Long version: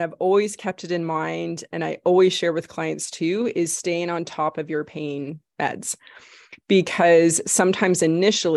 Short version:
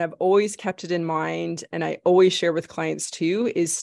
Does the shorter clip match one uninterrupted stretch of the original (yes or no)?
yes